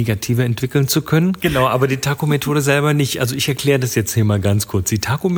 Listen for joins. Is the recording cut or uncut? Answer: cut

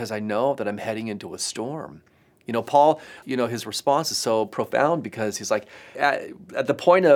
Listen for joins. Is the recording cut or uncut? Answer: cut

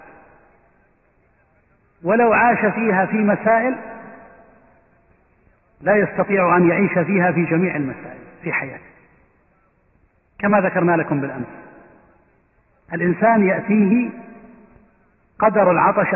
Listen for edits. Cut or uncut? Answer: uncut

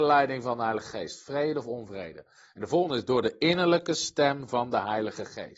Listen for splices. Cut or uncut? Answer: uncut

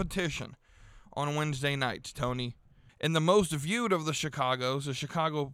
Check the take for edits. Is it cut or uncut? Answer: cut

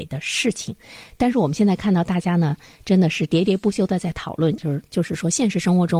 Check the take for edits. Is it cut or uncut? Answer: cut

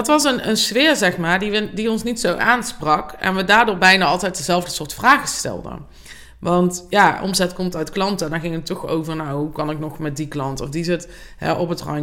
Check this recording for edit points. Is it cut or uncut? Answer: uncut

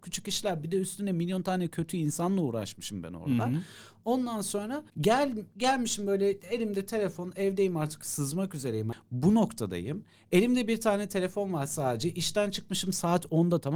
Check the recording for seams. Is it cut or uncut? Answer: cut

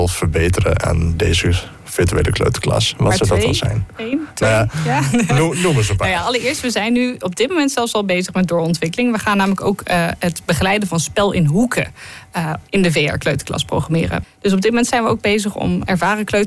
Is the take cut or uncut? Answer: cut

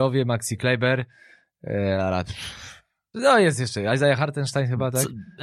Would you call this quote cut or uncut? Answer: cut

